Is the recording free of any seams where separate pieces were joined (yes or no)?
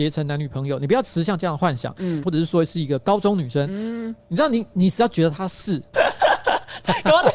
no